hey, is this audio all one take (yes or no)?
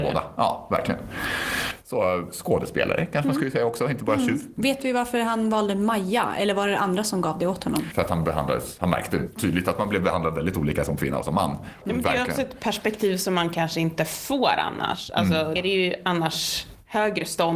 no